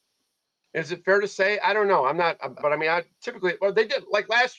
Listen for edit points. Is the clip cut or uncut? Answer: cut